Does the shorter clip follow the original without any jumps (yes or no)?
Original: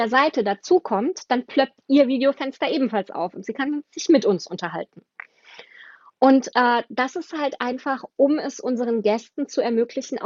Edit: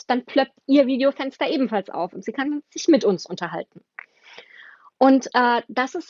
yes